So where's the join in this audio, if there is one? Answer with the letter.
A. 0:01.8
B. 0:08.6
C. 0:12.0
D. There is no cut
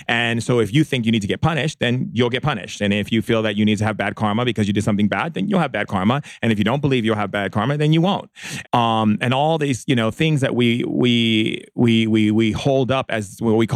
B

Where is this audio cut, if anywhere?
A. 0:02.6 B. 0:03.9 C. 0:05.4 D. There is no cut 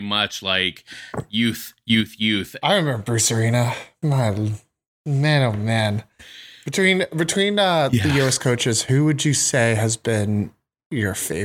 A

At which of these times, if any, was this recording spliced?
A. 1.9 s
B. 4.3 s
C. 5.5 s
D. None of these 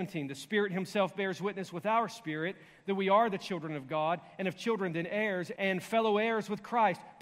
C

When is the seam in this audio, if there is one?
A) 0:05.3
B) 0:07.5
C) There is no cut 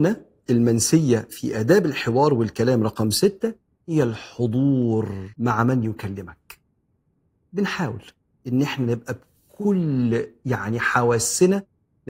A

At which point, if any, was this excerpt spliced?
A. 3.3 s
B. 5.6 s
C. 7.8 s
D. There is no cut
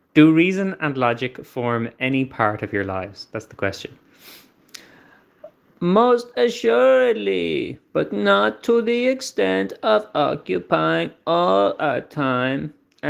C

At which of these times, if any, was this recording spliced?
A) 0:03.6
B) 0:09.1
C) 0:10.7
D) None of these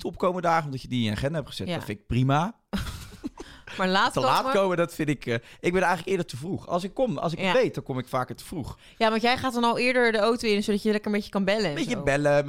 D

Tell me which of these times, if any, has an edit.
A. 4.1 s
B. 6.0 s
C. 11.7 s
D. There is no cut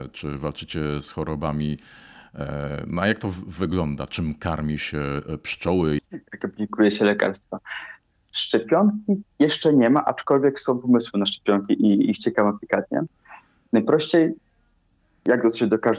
B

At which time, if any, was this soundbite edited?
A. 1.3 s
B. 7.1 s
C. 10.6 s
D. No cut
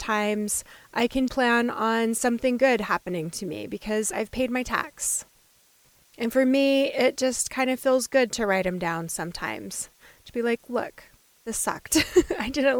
A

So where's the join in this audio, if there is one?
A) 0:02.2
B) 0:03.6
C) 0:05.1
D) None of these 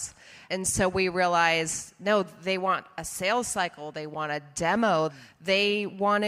C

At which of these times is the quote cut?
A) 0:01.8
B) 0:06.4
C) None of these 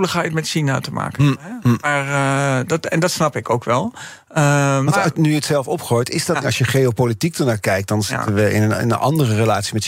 B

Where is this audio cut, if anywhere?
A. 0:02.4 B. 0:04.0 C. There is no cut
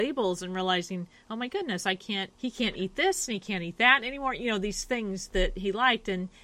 A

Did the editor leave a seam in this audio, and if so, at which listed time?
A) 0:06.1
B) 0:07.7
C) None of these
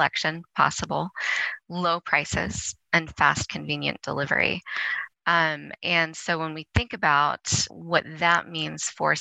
B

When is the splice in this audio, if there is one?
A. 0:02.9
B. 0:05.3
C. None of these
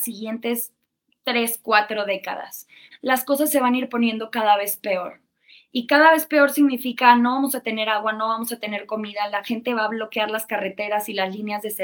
A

